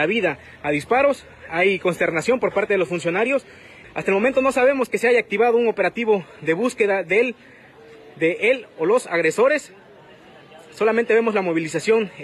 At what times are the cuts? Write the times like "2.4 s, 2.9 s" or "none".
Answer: 3.8 s